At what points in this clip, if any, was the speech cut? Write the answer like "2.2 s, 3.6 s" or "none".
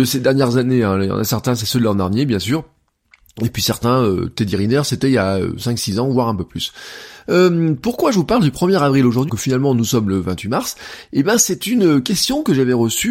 9.3 s